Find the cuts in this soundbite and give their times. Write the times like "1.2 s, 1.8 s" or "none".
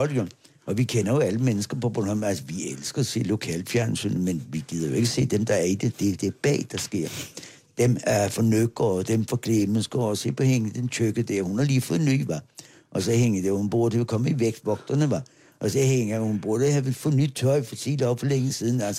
none